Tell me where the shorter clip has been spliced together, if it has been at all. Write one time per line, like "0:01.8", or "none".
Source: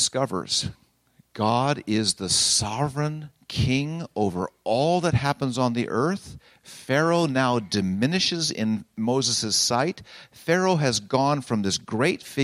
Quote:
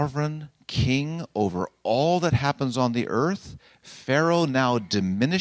none